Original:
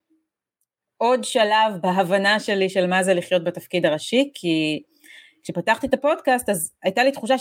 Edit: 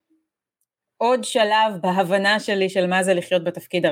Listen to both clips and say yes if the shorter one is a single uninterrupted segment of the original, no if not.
yes